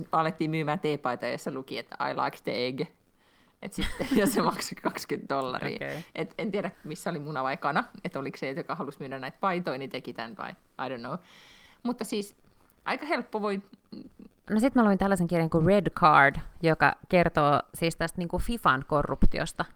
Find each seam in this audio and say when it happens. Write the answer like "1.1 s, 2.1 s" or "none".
6.7 s, 14.5 s